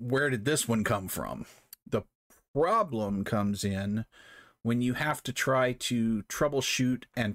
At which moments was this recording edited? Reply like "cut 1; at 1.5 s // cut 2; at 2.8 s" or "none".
cut 1; at 1.7 s